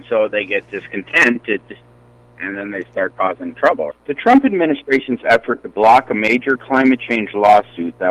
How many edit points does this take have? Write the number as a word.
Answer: one